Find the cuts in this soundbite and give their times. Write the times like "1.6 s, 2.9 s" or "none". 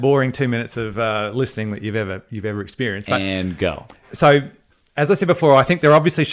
4.1 s